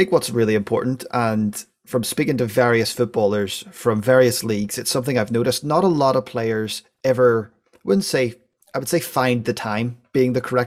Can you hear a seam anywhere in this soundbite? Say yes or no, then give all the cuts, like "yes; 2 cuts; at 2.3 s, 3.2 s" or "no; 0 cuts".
no; 0 cuts